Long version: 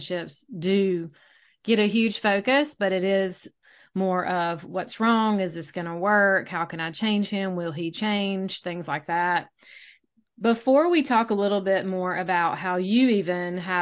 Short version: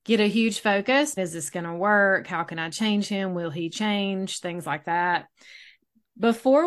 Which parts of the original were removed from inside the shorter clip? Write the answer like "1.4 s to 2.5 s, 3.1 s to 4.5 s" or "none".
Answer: 2.8 s to 5.4 s